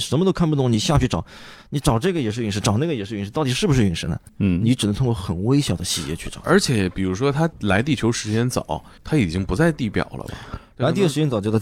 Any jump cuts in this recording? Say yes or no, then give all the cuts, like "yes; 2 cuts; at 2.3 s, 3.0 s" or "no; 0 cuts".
no; 0 cuts